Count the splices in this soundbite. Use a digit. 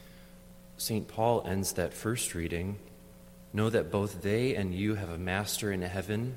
1